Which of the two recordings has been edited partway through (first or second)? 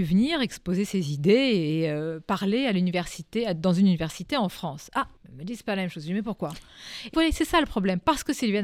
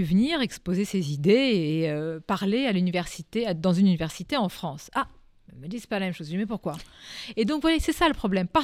first